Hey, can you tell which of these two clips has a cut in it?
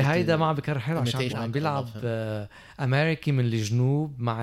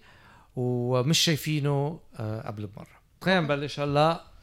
first; 1 cut; at 1.3 s

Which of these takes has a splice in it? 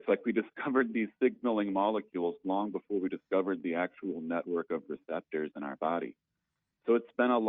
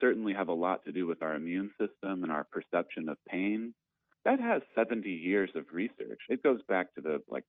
second; 1 cut; at 4.1 s

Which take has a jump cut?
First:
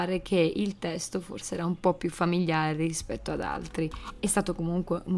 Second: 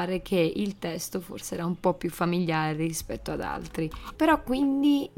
second; 1 cut; at 4.2 s

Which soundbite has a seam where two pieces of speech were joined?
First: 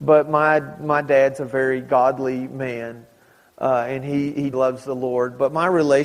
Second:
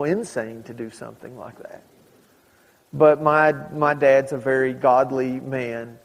first; 1 cut; at 4.5 s

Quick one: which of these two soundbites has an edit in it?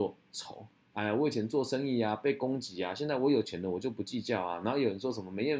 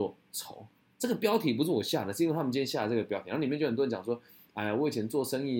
first; 1 cut; at 0.9 s

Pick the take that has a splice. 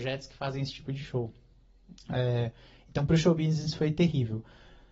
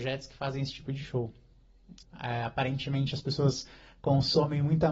second; 1 cut; at 2.0 s

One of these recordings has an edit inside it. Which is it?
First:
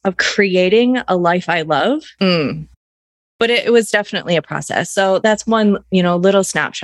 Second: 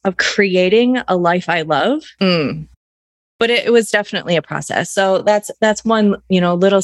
first; 1 cut; at 5.2 s

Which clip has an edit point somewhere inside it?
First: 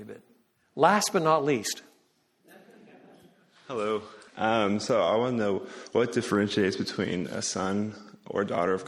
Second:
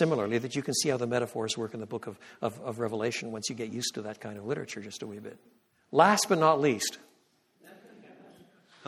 first; 1 cut; at 4.3 s

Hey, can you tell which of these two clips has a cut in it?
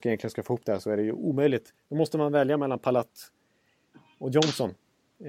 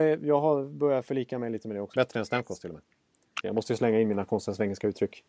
second; 2 cuts; at 1.9 s, 3.4 s

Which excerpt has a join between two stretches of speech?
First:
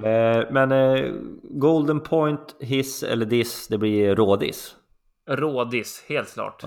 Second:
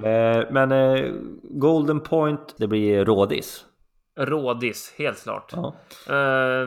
second; 1 cut; at 2.6 s

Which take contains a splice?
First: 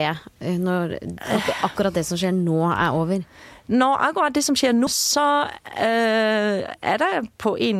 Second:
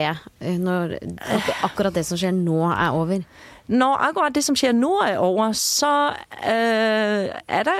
first; 1 cut; at 4.9 s

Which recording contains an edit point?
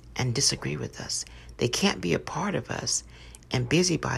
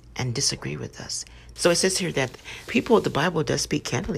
second; 2 cuts; at 1.6 s, 2.7 s

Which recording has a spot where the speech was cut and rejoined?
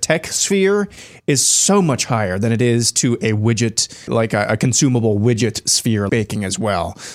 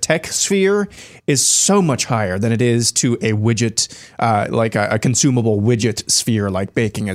first; 2 cuts; at 4.1 s, 6.1 s

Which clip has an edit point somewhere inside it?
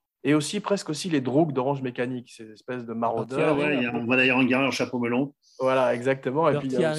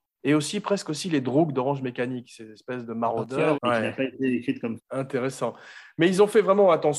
second; 2 cuts; at 3.5 s, 4.8 s

